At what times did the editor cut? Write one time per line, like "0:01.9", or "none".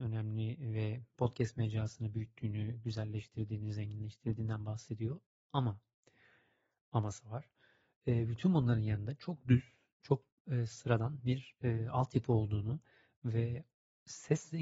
none